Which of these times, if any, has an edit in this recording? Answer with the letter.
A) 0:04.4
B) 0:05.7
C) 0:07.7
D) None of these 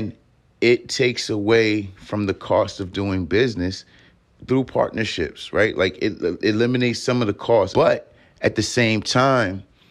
C